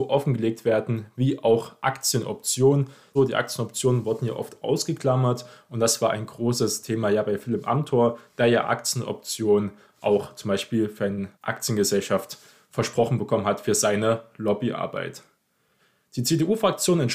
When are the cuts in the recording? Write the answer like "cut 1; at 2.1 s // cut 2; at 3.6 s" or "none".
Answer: cut 1; at 3.2 s // cut 2; at 11.3 s